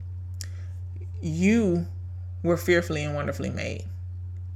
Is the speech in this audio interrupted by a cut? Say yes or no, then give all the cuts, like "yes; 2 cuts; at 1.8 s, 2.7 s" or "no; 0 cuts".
no; 0 cuts